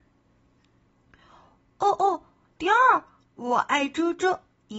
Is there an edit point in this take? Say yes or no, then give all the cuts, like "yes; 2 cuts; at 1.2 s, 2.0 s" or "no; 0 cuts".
yes; 1 cut; at 2.5 s